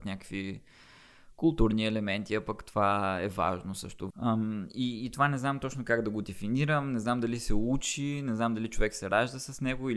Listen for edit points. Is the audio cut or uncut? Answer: cut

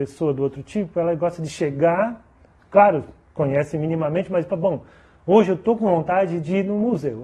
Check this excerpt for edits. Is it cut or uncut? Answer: uncut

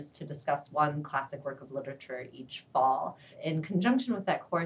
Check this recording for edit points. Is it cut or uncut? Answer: uncut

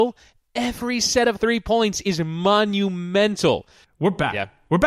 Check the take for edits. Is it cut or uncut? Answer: cut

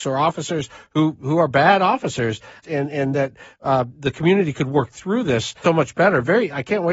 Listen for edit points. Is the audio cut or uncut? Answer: cut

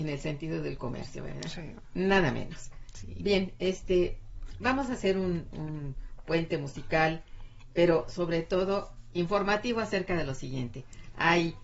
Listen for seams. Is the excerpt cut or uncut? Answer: uncut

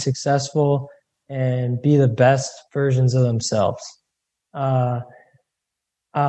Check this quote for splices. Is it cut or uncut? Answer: uncut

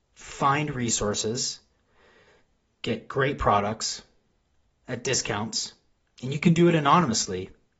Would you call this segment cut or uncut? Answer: uncut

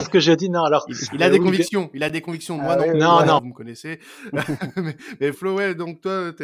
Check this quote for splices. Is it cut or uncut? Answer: cut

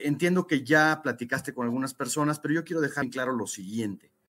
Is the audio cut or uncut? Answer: cut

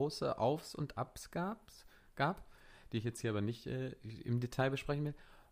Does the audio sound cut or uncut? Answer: uncut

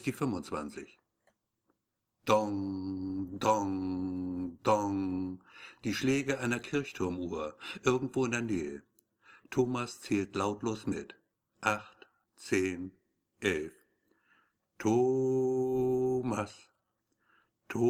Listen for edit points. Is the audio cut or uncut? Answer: cut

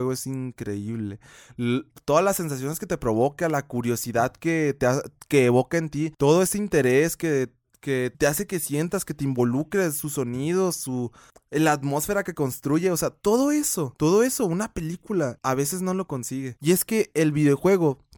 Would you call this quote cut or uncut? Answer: uncut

